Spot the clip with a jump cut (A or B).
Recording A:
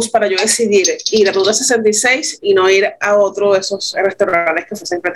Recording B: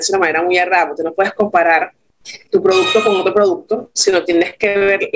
B